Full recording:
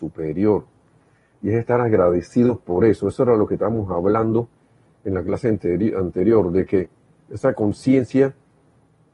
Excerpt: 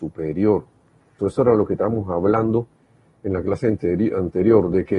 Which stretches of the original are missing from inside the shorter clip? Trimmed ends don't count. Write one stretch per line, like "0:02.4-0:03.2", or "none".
0:01.2-0:03.0